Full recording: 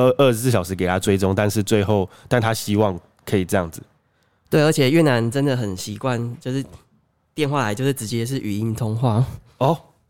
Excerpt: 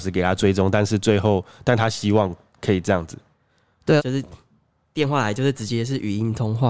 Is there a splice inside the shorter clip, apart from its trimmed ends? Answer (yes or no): yes